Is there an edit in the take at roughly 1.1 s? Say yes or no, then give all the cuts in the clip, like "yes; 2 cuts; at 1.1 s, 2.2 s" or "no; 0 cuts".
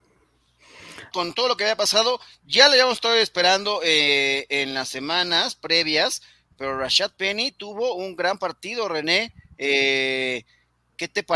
yes; 1 cut; at 1.1 s